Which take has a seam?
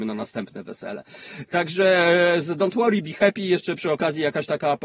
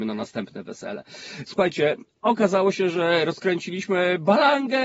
second; 1 cut; at 1.5 s

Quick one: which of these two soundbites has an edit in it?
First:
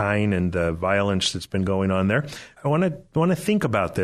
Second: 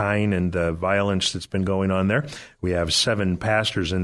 first; 1 cut; at 2.6 s

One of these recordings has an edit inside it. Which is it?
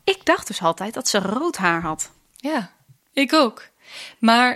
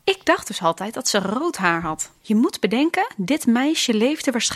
second; 1 cut; at 2.2 s

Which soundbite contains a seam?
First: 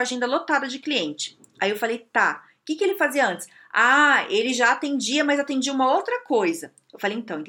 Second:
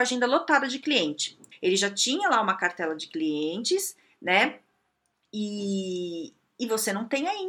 second; 1 cut; at 1.5 s

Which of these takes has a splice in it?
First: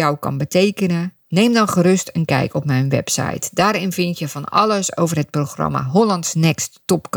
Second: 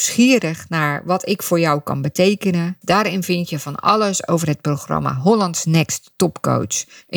second; 1 cut; at 2.8 s

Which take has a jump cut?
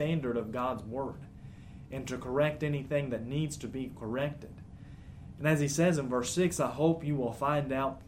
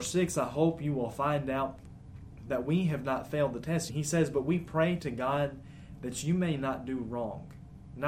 second; 1 cut; at 3.9 s

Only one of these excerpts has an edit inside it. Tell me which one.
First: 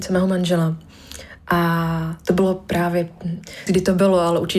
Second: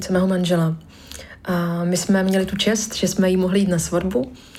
first; 2 cuts; at 1.4 s, 3.7 s

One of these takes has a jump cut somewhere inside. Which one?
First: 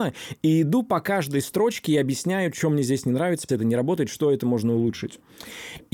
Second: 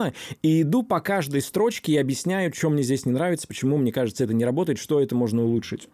first; 1 cut; at 3.5 s

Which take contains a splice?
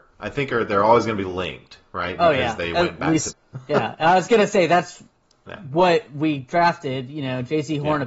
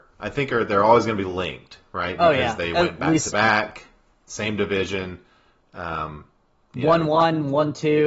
first; 1 cut; at 3.3 s

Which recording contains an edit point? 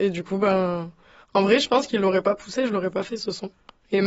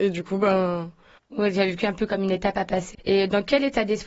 second; 2 cuts; at 1.2 s, 2.9 s

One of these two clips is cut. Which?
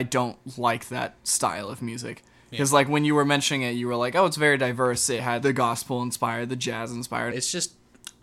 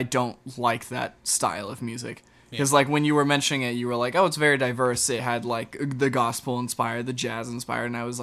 first; 2 cuts; at 5.4 s, 7.3 s

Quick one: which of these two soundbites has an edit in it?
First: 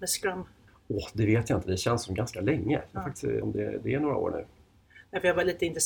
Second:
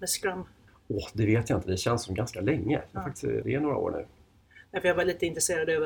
second; 1 cut; at 3.4 s

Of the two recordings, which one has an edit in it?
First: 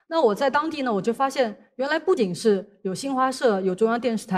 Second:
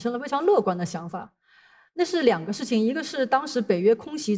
first; 1 cut; at 2.2 s

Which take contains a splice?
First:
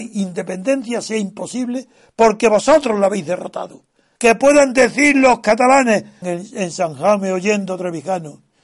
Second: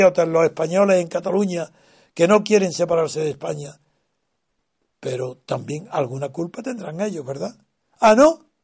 first; 2 cuts; at 4.2 s, 6.2 s

